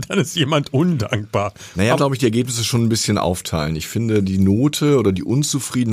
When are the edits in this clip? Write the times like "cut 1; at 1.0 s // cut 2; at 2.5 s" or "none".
cut 1; at 2.0 s